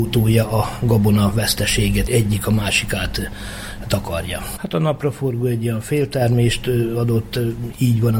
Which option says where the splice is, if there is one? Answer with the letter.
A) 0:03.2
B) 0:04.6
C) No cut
B